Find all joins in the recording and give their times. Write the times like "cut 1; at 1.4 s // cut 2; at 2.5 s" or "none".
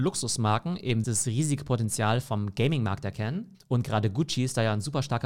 cut 1; at 1.0 s // cut 2; at 3.5 s